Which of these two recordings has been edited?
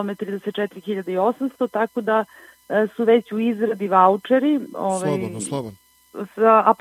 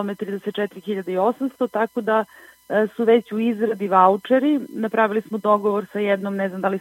first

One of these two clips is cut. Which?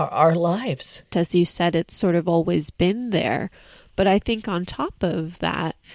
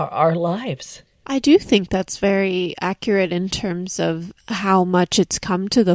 first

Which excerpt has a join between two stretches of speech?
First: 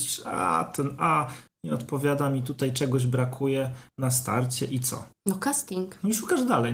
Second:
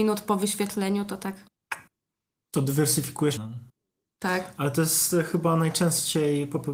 second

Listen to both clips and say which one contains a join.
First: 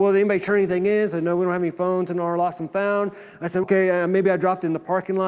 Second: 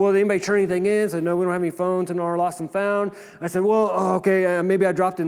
first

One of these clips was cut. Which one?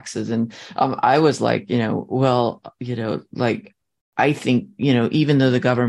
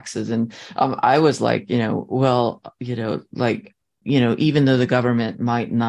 second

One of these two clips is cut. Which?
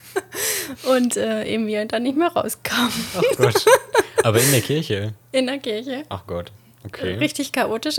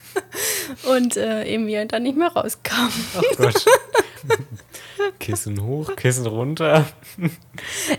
second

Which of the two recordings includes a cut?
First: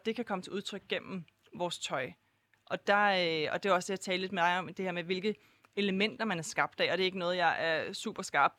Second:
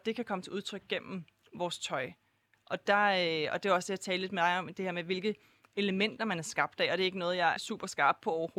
second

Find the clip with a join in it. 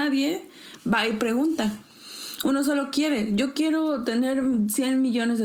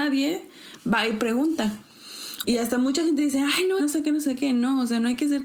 second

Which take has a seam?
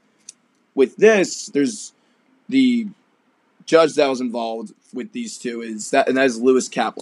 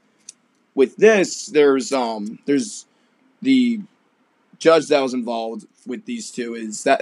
first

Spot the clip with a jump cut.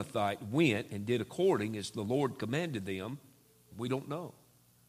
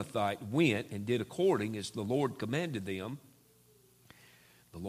first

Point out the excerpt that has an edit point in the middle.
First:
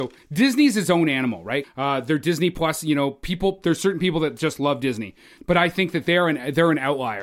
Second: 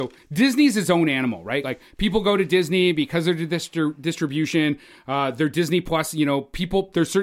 first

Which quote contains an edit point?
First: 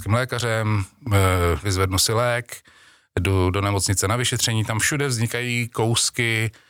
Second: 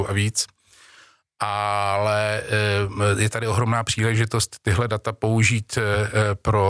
first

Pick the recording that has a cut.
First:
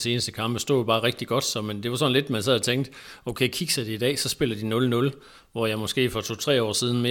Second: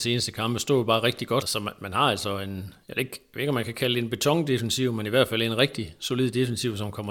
second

